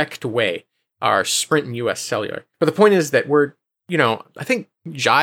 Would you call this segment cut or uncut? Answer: cut